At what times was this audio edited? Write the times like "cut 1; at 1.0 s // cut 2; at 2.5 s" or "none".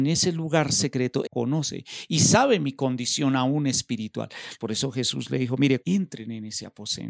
cut 1; at 1.2 s // cut 2; at 4.6 s // cut 3; at 5.8 s